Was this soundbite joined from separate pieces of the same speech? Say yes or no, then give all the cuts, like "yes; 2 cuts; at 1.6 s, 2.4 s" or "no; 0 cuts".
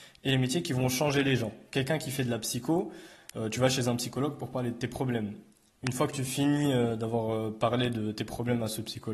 no; 0 cuts